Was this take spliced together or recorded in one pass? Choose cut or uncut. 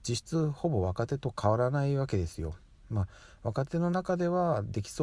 uncut